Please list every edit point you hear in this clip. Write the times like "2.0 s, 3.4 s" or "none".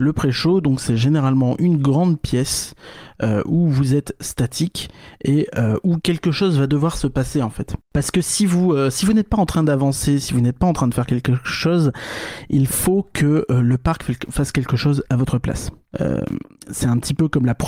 none